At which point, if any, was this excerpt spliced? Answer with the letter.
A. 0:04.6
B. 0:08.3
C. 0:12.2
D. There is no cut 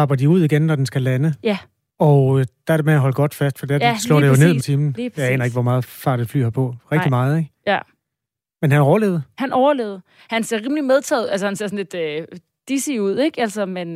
A